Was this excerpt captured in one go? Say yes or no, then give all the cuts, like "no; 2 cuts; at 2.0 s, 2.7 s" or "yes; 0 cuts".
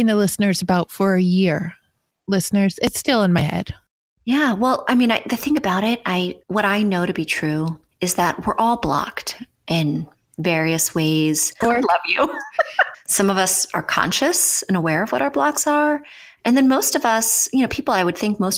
no; 3 cuts; at 6.4 s, 11.6 s, 12.9 s